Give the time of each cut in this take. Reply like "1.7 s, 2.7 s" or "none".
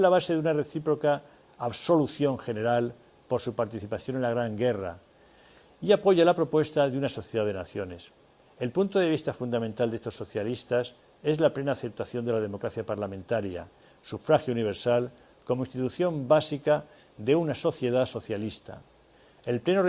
8.4 s